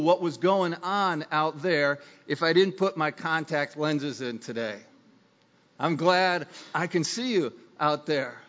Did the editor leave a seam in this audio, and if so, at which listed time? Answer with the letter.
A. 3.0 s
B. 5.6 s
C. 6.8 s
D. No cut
B